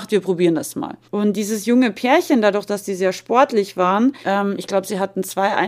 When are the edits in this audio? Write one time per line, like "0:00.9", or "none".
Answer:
0:01.0
0:04.2